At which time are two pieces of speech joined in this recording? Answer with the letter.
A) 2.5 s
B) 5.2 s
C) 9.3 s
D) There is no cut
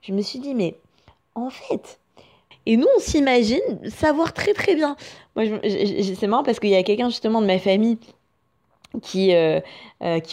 A